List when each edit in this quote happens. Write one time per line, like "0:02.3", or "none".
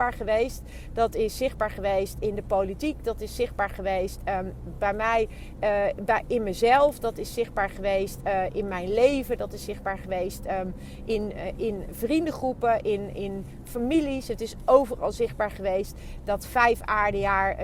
none